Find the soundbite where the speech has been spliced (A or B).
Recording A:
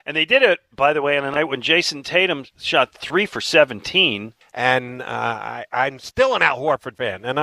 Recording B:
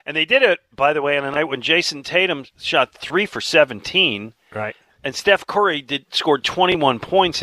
A